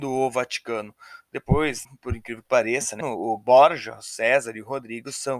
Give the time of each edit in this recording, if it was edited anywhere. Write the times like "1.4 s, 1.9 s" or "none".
1.9 s, 3.0 s